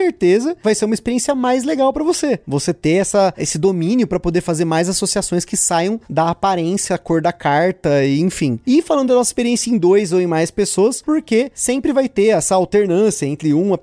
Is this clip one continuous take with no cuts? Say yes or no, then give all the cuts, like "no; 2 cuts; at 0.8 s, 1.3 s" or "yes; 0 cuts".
no; 1 cut; at 11.0 s